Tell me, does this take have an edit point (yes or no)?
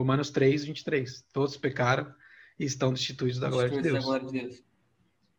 no